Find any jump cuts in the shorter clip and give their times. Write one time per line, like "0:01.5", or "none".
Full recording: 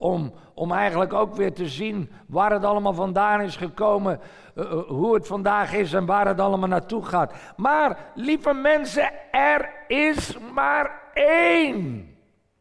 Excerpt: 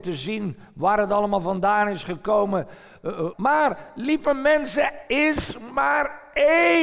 0:03.3
0:05.1